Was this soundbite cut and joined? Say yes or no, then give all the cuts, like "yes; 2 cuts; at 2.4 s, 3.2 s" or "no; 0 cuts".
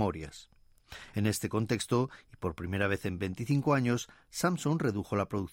no; 0 cuts